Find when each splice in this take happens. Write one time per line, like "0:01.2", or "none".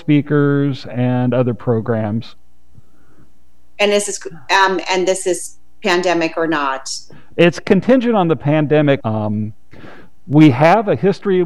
0:09.0